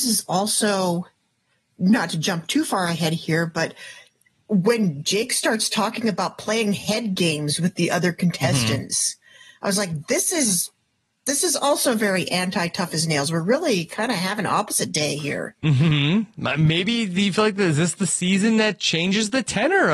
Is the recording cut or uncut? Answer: uncut